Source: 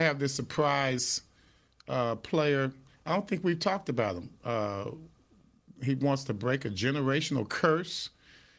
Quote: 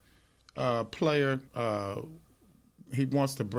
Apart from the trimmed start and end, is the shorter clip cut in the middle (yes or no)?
yes